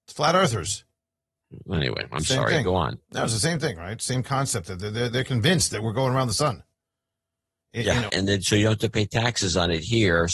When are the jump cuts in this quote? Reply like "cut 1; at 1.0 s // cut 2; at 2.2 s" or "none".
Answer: cut 1; at 8.1 s